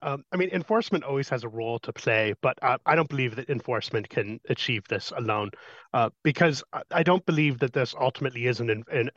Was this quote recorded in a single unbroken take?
yes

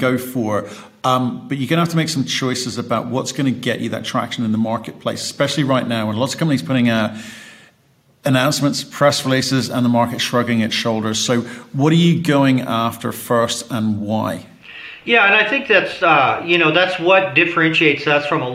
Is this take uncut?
yes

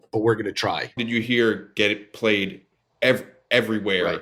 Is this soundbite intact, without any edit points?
no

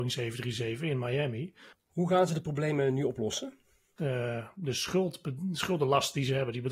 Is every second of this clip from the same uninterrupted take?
no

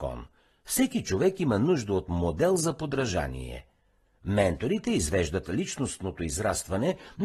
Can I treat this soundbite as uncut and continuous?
yes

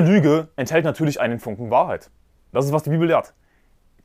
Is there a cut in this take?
yes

